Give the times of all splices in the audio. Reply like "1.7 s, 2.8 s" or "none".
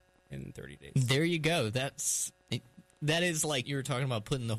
3.6 s